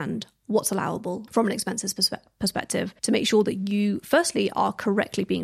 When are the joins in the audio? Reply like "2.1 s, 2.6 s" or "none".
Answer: 1.3 s, 3.0 s